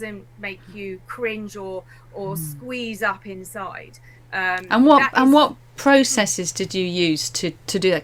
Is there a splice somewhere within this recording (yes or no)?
no